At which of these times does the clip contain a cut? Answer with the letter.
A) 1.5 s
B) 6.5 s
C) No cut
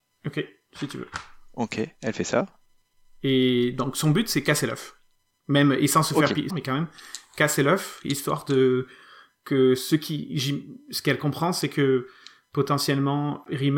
B